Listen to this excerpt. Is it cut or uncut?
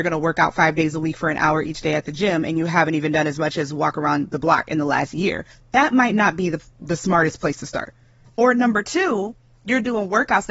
uncut